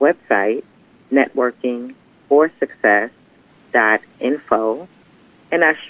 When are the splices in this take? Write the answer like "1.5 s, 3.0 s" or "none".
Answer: none